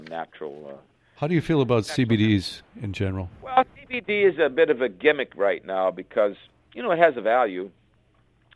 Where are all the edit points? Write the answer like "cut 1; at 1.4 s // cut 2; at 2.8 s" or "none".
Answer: none